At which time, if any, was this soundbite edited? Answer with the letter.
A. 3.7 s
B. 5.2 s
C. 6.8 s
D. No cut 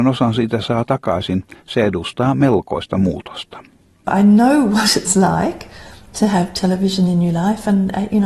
D